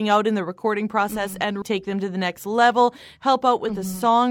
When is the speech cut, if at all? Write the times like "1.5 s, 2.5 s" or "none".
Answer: 1.6 s